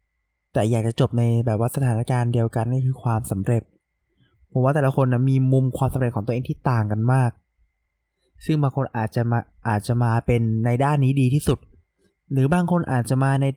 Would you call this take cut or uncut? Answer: uncut